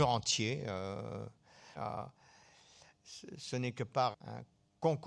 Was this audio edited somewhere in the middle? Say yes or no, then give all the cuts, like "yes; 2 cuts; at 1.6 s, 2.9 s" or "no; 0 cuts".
yes; 2 cuts; at 1.7 s, 4.1 s